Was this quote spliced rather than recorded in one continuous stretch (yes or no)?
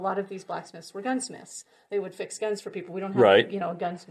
no